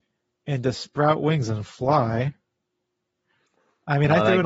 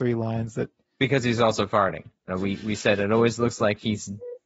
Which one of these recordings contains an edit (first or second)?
second